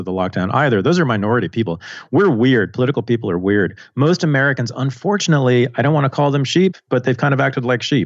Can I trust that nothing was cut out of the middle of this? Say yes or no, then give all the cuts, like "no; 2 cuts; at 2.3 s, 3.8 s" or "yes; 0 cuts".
yes; 0 cuts